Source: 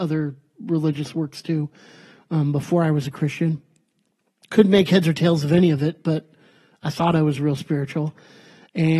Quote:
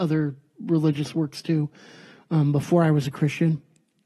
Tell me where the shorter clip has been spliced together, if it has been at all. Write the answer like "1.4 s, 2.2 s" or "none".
none